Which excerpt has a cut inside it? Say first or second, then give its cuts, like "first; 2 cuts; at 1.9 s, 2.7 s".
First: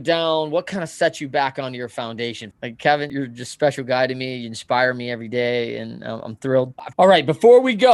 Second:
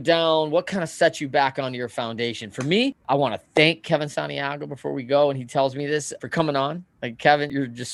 first; 2 cuts; at 2.5 s, 6.9 s